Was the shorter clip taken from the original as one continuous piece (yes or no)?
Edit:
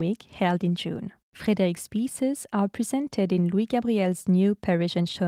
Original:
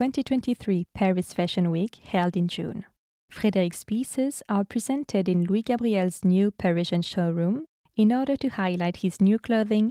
no